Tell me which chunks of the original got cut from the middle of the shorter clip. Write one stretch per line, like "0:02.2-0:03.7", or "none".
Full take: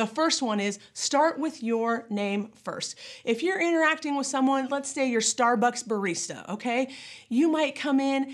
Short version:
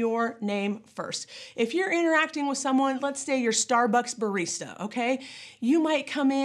none